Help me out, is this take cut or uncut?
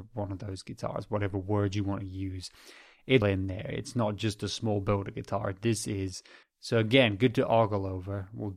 cut